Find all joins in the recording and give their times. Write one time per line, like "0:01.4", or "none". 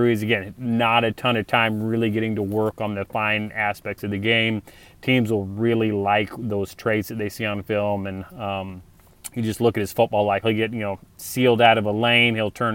0:10.4

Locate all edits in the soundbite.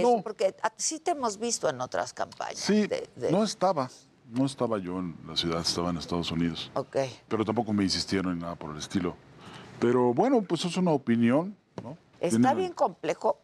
0:07.3
0:12.1

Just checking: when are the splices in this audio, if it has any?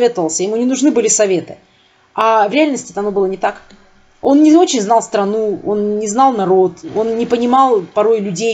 none

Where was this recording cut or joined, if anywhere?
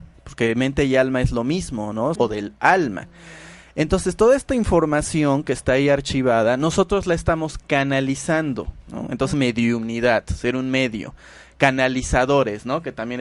0:02.2
0:09.3

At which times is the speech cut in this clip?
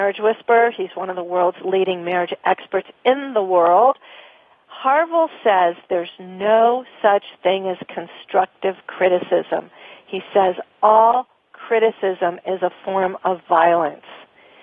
none

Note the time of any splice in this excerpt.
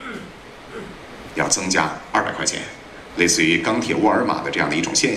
0:03.1

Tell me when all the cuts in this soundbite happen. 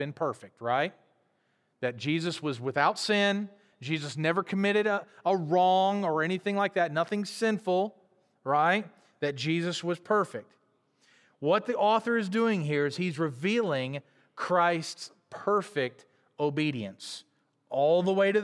none

